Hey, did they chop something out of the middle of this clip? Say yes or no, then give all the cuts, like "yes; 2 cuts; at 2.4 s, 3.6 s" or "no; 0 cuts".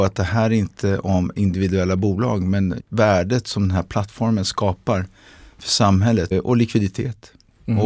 yes; 2 cuts; at 2.8 s, 6.3 s